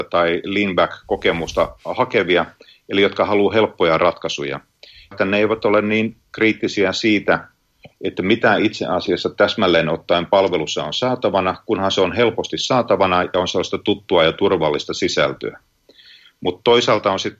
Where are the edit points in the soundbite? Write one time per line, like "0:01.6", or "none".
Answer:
0:05.1